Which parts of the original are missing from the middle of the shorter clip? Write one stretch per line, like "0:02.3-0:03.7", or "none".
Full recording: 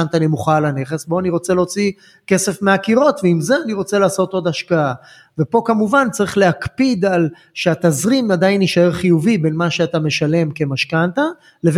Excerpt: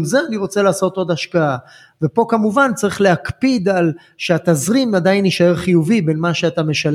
none